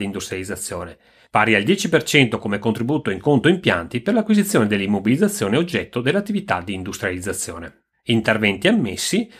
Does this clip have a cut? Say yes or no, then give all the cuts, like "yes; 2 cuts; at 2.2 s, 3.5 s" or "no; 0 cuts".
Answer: no; 0 cuts